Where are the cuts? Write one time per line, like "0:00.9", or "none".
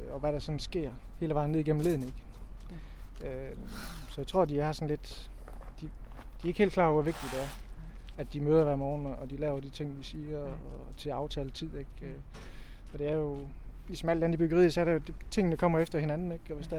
none